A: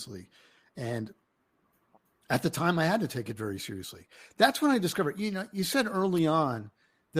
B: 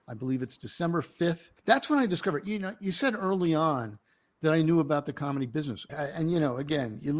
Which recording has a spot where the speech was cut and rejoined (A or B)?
B